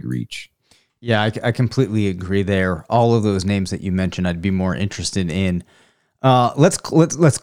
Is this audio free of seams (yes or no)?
yes